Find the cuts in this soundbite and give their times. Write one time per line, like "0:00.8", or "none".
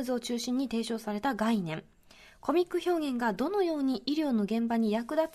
none